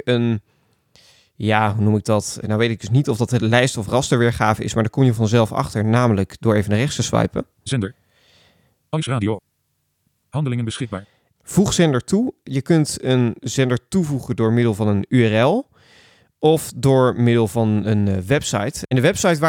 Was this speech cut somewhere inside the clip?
yes; 2 cuts; at 2.4 s, 11.3 s

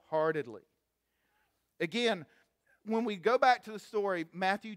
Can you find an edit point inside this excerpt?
no; 0 cuts

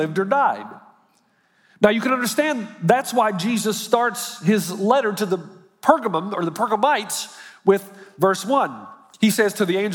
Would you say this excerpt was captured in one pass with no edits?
yes; 0 cuts

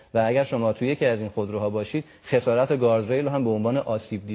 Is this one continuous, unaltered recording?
yes; 0 cuts

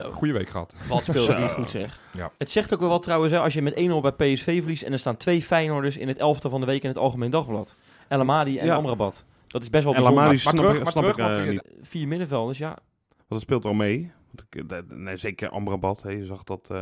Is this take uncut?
no; 3 cuts; at 2.0 s, 11.6 s, 13.2 s

